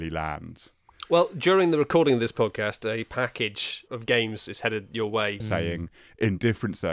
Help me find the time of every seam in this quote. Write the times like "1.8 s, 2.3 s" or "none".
3.9 s, 5.4 s